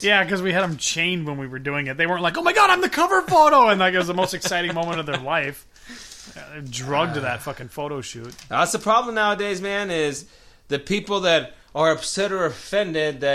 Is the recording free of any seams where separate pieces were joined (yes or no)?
yes